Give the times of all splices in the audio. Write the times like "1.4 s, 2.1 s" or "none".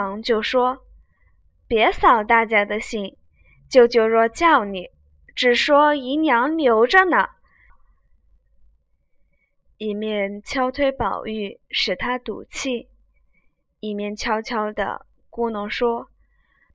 7.7 s